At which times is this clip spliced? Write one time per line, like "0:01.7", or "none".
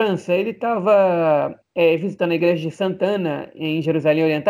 none